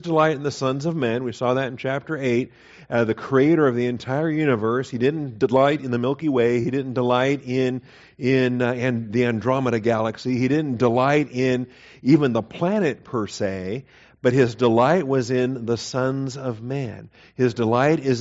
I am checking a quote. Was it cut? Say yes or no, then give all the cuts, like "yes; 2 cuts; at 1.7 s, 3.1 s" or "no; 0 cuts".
no; 0 cuts